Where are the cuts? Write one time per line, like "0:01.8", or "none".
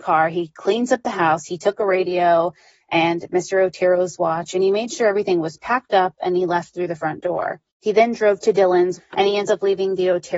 0:07.7
0:09.0